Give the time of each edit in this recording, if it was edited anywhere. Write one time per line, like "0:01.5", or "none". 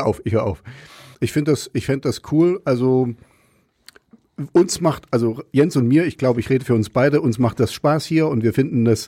0:01.1